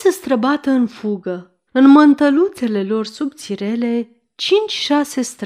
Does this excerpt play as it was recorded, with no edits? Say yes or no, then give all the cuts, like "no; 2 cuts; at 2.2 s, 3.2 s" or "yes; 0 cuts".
no; 1 cut; at 1.7 s